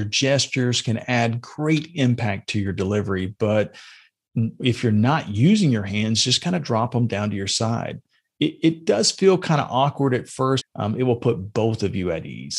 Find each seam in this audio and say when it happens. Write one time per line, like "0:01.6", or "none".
0:10.6